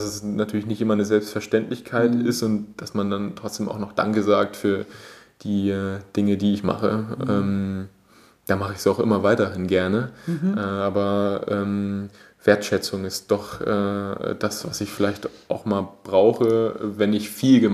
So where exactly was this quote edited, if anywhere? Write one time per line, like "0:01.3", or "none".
none